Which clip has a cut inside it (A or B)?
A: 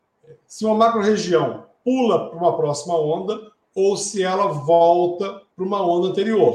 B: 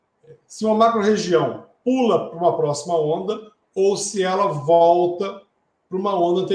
A